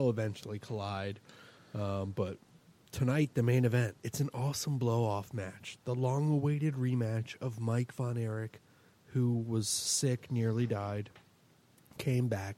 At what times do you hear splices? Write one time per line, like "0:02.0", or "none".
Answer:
0:04.0